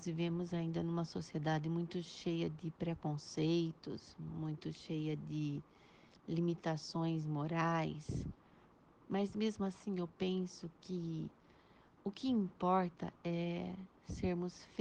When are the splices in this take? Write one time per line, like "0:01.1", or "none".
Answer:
none